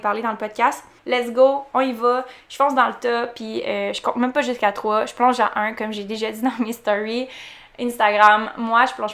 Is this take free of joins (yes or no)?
no